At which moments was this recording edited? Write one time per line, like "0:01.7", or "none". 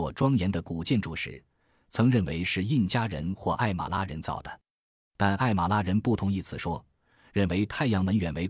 none